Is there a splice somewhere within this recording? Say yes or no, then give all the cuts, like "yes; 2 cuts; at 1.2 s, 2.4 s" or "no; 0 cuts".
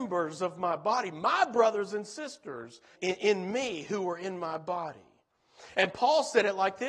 yes; 2 cuts; at 2.9 s, 5.7 s